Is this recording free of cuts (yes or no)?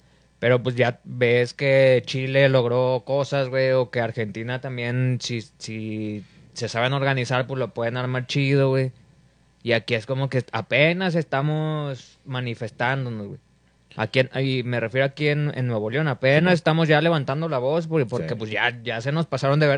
yes